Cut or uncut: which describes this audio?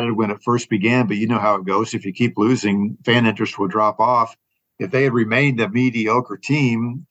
uncut